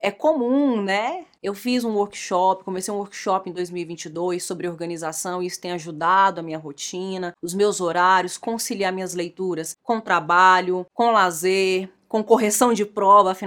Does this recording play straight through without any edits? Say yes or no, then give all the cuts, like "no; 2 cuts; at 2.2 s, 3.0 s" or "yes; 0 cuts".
no; 1 cut; at 1.4 s